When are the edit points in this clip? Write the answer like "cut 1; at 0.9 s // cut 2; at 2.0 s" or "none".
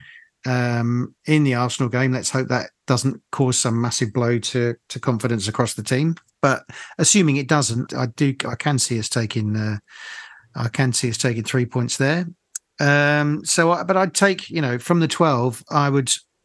cut 1; at 7.9 s